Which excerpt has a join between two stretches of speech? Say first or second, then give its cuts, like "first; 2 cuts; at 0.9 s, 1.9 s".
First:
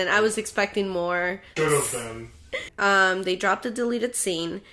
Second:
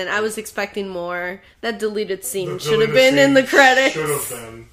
first; 2 cuts; at 1.6 s, 2.7 s